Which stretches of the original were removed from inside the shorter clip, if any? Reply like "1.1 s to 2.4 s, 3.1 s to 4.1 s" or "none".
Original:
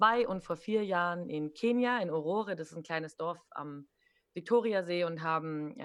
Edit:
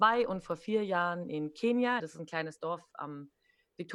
2.0 s to 2.6 s